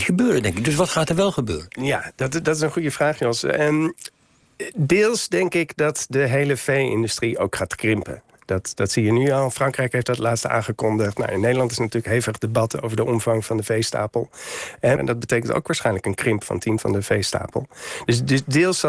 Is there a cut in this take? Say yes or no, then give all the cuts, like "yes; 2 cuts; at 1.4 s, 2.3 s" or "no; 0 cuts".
yes; 2 cuts; at 15.0 s, 16.8 s